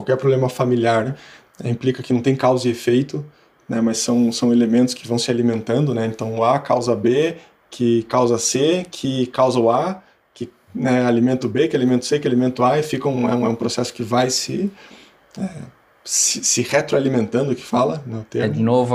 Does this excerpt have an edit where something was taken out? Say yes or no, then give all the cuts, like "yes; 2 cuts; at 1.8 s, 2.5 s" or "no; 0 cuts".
no; 0 cuts